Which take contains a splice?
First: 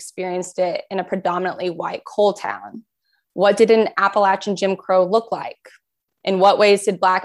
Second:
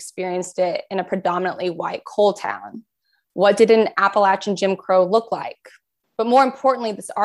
second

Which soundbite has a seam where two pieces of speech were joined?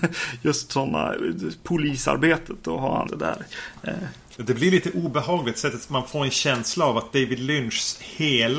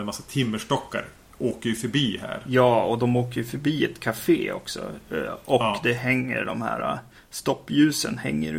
first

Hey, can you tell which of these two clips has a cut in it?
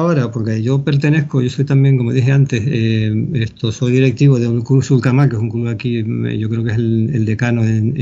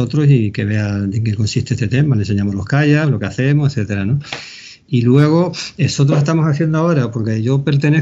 second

